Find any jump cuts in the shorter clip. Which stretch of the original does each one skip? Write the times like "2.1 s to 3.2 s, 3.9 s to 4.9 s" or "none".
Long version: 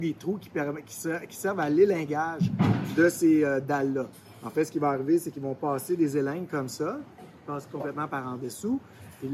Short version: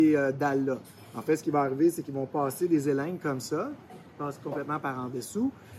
none